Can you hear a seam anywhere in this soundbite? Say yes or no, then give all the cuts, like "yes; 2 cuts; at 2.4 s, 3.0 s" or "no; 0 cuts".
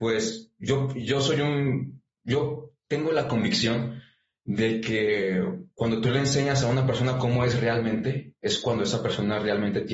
no; 0 cuts